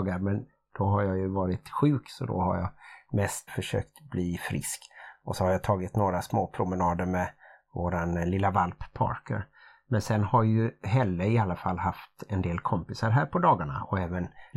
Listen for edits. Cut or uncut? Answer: cut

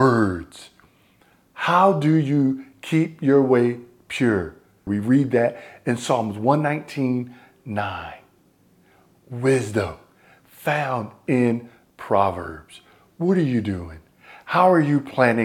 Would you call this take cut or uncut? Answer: cut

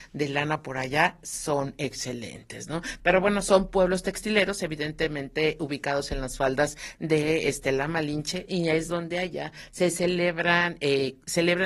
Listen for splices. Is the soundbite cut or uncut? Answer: cut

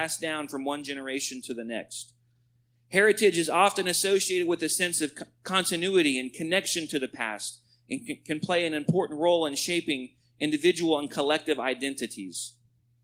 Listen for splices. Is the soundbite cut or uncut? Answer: uncut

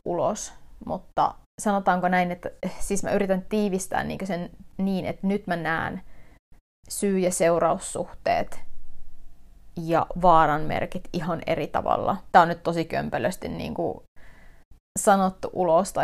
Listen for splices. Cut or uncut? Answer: cut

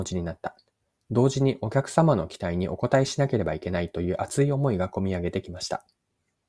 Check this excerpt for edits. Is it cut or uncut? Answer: uncut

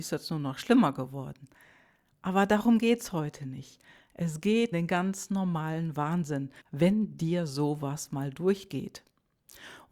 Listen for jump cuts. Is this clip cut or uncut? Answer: cut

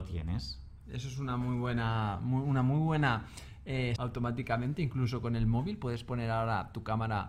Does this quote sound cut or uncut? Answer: cut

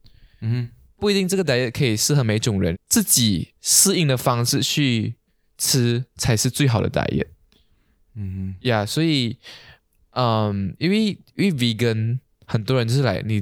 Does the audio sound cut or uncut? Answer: cut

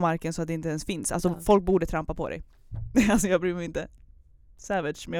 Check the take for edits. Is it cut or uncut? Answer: uncut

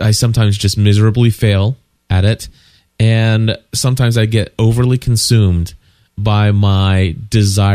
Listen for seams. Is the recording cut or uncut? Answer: uncut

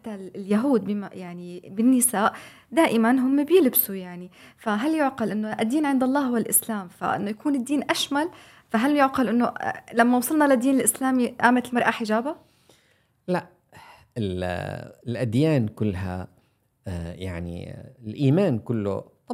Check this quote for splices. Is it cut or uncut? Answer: uncut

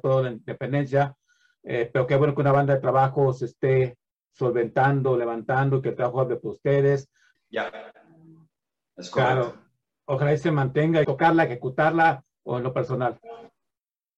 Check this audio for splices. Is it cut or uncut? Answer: cut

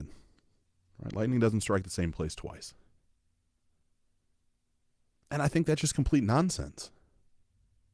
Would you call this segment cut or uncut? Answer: uncut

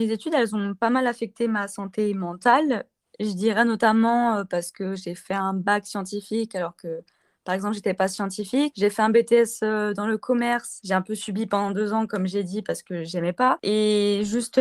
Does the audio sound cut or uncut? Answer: uncut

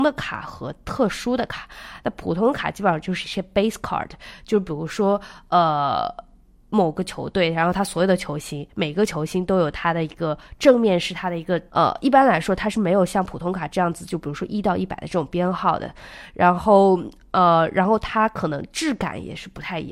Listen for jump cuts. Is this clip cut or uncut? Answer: cut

